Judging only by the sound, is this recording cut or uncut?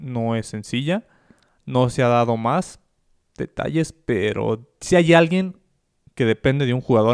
uncut